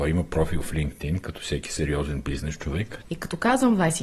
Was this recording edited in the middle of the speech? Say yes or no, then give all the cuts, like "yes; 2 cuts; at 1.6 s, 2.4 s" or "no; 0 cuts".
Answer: yes; 1 cut; at 3.0 s